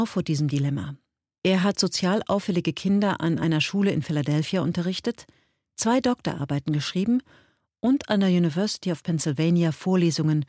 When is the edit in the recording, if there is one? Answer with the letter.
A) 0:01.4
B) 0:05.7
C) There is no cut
A